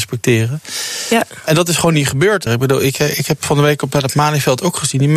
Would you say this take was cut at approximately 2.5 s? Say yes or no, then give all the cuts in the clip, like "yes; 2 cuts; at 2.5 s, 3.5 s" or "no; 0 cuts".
yes; 1 cut; at 2.5 s